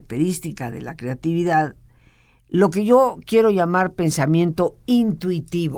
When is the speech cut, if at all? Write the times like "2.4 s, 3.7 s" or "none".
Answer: none